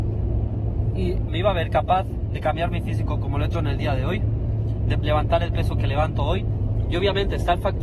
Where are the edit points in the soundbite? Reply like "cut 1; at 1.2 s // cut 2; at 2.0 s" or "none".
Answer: cut 1; at 1.3 s // cut 2; at 5.0 s // cut 3; at 6.8 s